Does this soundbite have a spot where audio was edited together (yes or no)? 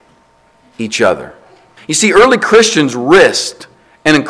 yes